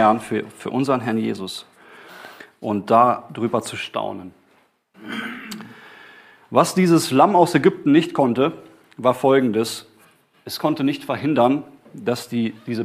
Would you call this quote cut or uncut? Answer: uncut